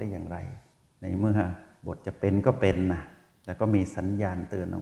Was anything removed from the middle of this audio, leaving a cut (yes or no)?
no